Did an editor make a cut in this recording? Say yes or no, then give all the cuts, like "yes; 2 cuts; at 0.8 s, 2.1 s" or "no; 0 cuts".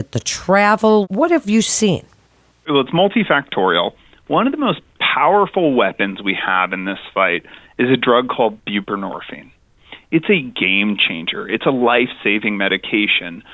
no; 0 cuts